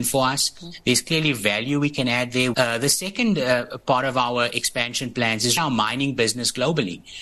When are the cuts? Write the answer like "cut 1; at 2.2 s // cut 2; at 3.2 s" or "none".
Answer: cut 1; at 2.5 s // cut 2; at 5.6 s